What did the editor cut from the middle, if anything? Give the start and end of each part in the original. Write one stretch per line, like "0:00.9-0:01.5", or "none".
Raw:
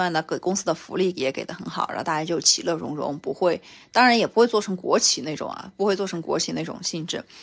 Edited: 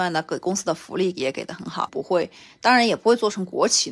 0:01.9-0:03.2